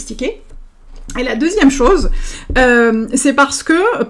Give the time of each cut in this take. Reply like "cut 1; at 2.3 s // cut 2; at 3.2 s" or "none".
none